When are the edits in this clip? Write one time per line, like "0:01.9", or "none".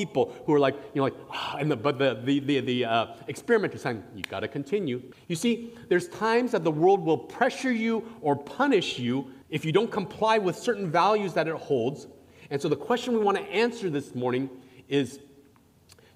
0:05.1
0:09.4

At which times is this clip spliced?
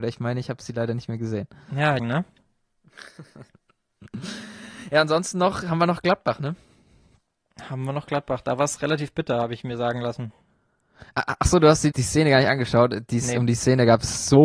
0:02.0
0:11.9

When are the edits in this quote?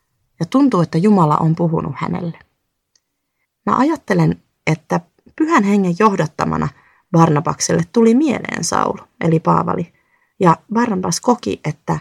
0:03.4

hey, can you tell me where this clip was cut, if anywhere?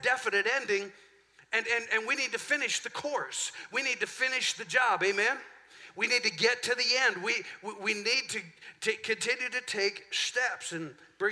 none

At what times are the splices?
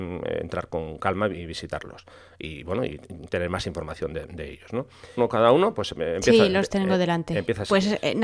0:05.2

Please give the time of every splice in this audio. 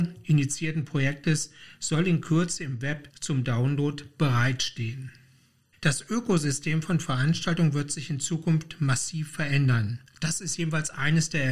none

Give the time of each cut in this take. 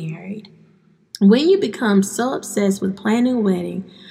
0:01.1

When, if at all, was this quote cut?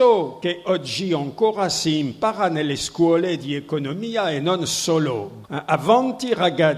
0:05.4

